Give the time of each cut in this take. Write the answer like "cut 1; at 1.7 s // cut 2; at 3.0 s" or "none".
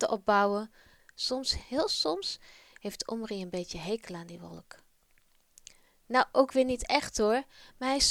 cut 1; at 1.0 s